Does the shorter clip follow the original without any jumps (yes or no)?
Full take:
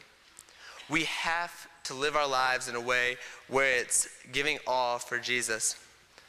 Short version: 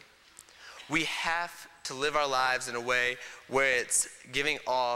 yes